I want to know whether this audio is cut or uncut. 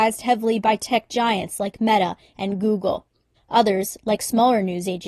cut